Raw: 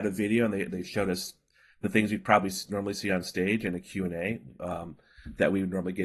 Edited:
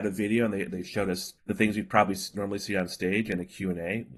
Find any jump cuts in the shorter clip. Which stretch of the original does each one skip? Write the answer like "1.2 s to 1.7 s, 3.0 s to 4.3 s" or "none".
1.4 s to 1.7 s

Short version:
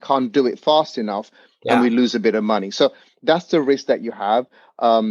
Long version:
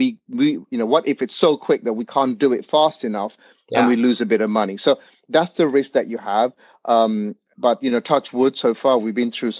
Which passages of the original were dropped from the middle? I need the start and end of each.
none

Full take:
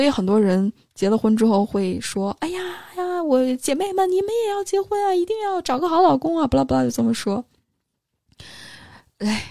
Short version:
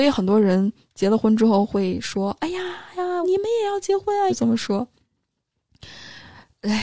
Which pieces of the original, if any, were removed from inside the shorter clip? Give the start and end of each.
3.2 s to 4.1 s, 5.1 s to 6.9 s

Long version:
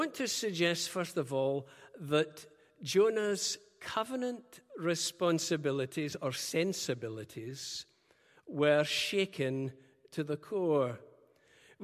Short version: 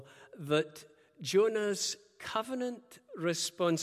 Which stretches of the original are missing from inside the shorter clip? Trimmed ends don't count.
none

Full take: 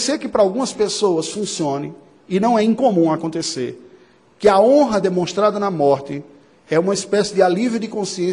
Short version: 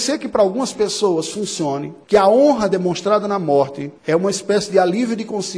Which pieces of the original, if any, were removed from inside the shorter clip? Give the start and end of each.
2.0 s to 4.4 s, 6.3 s to 6.6 s

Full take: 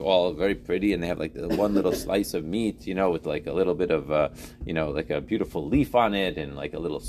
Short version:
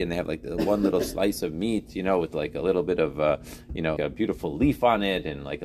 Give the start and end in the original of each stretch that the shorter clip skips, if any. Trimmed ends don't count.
4.9 s to 5.1 s

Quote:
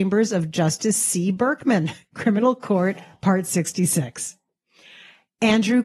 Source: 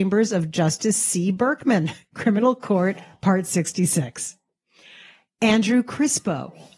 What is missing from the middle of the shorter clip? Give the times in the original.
none

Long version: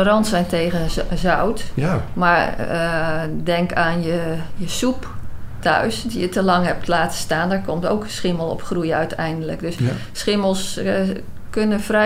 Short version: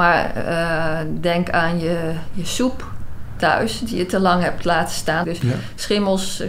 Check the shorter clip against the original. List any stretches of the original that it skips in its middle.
7.5 s to 9.6 s

